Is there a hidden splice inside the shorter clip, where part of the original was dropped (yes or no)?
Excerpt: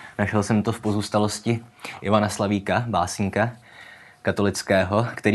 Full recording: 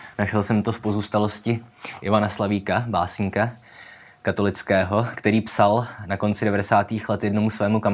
no